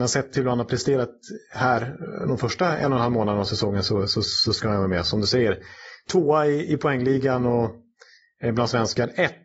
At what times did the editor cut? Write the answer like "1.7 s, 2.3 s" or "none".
none